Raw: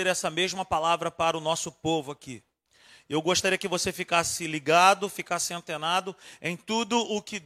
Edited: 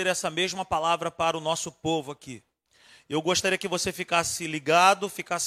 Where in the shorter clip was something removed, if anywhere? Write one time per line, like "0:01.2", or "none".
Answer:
none